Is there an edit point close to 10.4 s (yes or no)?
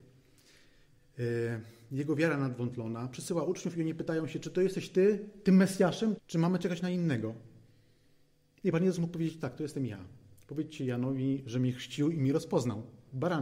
no